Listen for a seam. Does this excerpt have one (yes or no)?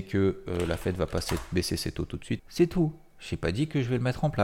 yes